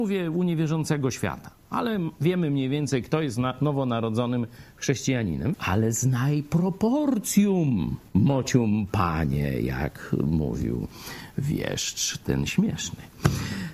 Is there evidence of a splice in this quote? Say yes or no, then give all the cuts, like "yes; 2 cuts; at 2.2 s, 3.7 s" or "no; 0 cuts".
yes; 2 cuts; at 5.5 s, 8.1 s